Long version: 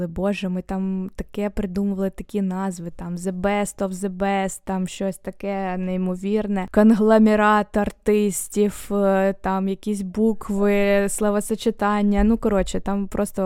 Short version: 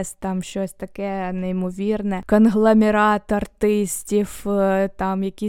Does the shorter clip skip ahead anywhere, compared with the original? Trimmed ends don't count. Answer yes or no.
no